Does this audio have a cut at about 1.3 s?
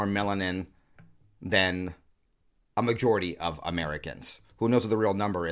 no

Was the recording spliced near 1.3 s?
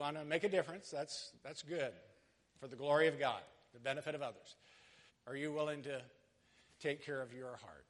yes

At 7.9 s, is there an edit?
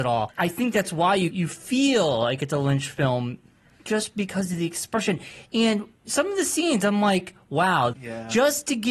yes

